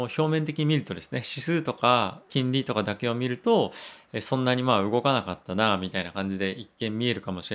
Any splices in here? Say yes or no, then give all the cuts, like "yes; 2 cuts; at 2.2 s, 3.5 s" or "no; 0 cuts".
yes; 1 cut; at 2.3 s